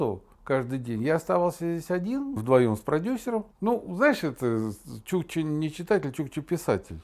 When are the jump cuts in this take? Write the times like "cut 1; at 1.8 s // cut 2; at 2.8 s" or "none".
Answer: cut 1; at 2.4 s // cut 2; at 3.5 s